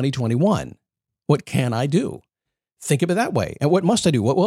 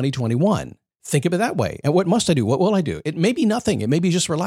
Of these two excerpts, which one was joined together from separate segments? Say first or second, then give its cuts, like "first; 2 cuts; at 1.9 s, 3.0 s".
second; 1 cut; at 0.9 s